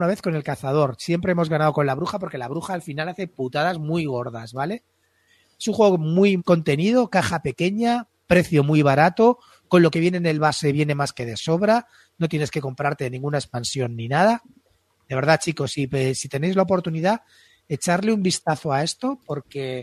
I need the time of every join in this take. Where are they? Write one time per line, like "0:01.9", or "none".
0:06.4